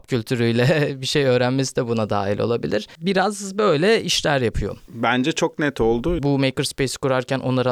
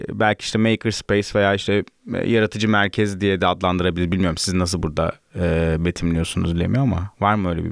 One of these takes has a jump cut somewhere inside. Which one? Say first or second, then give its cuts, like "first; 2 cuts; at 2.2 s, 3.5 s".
first; 1 cut; at 6.2 s